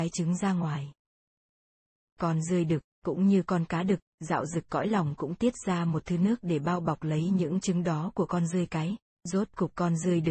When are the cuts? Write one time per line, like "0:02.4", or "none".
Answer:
0:09.2